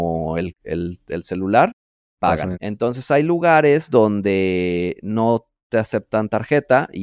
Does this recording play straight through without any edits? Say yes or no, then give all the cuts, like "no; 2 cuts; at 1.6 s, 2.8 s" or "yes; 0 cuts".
no; 1 cut; at 2.5 s